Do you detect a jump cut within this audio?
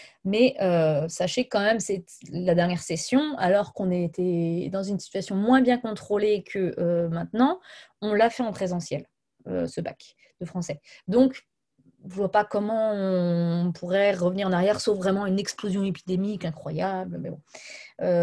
no; 0 cuts

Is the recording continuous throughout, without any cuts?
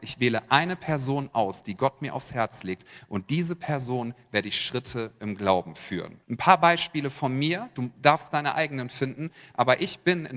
no; 1 cut; at 6.2 s

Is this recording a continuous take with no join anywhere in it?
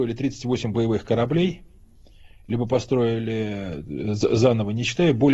yes; 0 cuts

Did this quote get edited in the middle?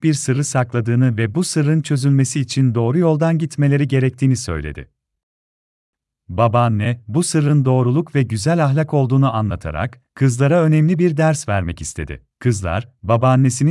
yes; 1 cut; at 12.3 s

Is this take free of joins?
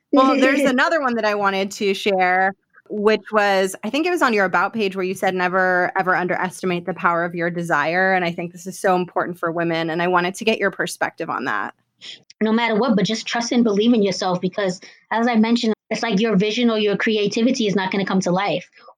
no; 2 cuts; at 12.2 s, 15.7 s

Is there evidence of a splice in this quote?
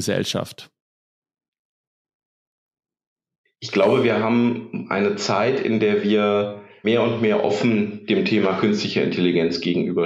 yes; 1 cut; at 6.8 s

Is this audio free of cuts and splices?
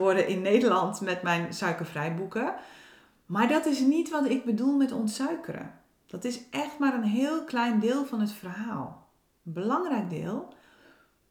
yes; 0 cuts

